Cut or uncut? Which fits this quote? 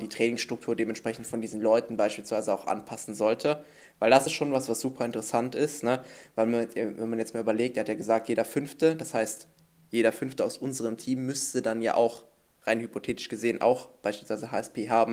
uncut